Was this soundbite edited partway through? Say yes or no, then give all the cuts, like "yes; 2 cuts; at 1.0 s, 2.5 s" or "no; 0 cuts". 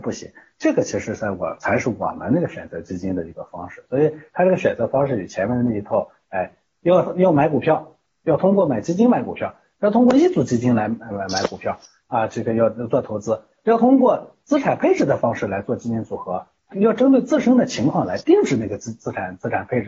yes; 2 cuts; at 11.1 s, 16.7 s